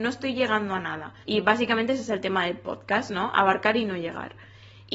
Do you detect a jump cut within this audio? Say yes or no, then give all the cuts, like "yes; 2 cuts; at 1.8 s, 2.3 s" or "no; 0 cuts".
yes; 1 cut; at 1.2 s